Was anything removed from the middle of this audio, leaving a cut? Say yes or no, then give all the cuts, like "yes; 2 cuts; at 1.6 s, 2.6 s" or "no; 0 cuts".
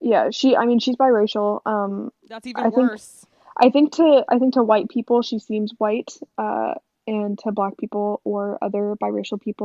yes; 1 cut; at 2.2 s